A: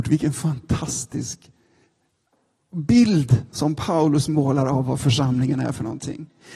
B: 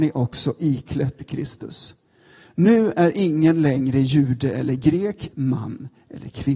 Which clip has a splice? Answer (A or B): B